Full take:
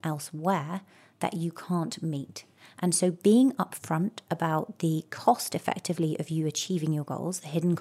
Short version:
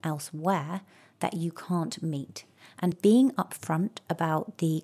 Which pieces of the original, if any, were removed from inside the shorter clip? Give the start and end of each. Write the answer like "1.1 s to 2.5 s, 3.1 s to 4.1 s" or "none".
2.9 s to 3.1 s